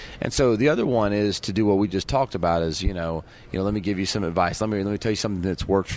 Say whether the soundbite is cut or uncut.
uncut